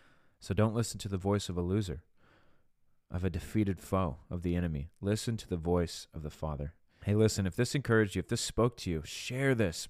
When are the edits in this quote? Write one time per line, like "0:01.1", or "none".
0:07.0